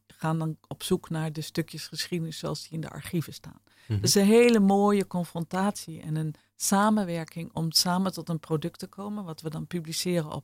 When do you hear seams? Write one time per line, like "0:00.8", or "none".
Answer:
none

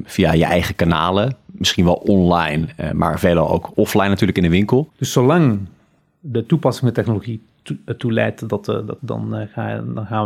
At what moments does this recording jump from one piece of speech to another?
0:04.9
0:09.0

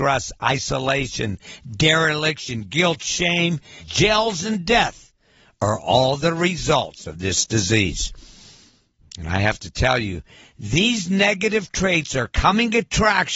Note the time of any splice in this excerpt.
0:03.8

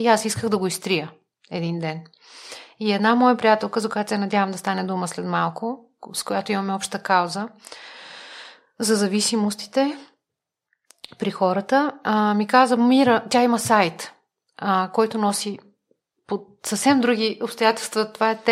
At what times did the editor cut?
none

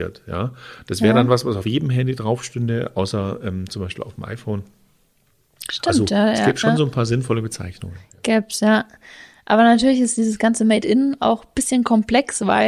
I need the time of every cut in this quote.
none

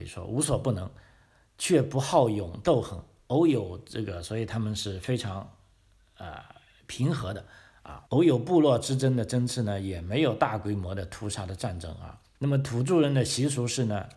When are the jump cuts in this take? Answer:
0:08.1
0:12.3

